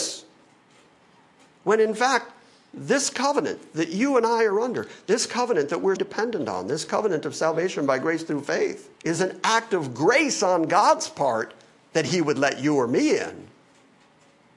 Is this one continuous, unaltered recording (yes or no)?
no